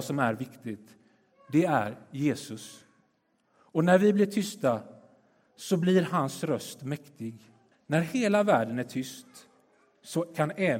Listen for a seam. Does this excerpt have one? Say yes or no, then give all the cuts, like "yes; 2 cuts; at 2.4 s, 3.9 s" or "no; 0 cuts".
yes; 1 cut; at 7.7 s